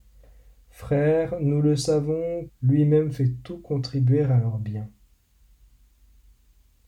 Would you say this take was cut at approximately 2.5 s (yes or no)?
yes